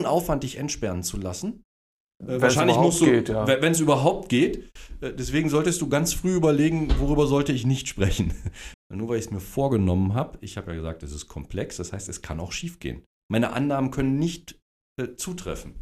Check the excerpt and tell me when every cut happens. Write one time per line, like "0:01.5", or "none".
0:08.7